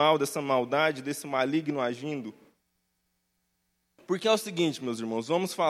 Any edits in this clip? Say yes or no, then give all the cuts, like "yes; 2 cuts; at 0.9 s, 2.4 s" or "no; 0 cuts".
no; 0 cuts